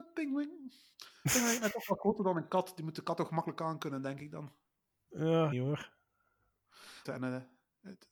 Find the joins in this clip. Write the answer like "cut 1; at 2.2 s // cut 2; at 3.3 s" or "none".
cut 1; at 5.5 s // cut 2; at 7.1 s